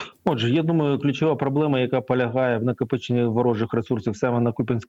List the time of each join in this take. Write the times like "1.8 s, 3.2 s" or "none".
none